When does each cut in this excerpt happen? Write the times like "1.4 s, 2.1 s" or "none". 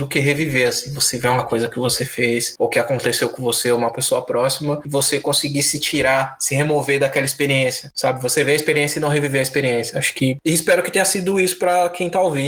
none